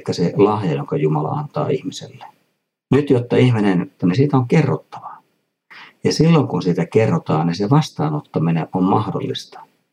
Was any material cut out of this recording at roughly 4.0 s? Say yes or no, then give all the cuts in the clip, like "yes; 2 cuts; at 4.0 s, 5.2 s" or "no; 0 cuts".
yes; 1 cut; at 4.0 s